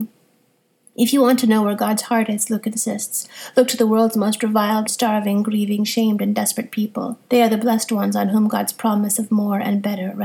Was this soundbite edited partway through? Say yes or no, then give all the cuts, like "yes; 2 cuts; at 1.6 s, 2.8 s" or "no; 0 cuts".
yes; 2 cuts; at 4.9 s, 7.3 s